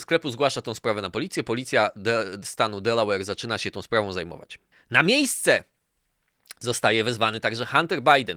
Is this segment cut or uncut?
uncut